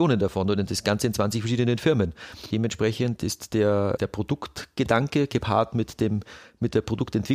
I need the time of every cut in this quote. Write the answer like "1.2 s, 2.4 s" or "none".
none

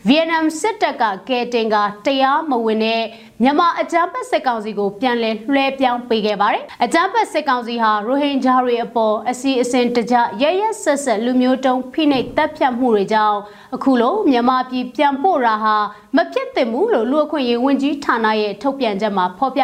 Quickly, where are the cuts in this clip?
none

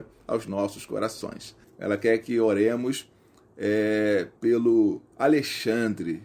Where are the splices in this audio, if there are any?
1.6 s

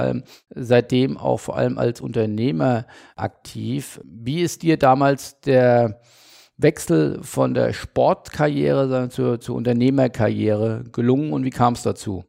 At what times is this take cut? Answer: none

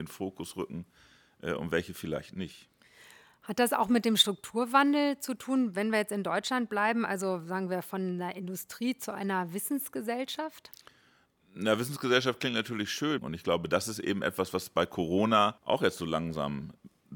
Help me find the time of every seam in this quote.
13.2 s, 15.6 s

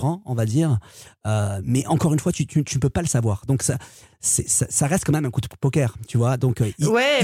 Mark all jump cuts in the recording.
none

